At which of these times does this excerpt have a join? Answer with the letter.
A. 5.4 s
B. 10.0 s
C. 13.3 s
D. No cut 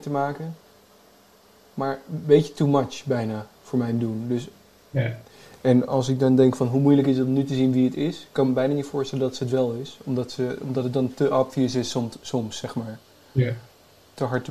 D